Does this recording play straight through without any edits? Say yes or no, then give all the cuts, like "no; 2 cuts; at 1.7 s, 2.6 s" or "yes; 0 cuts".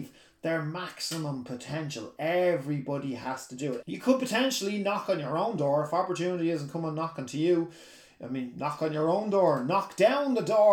no; 1 cut; at 3.8 s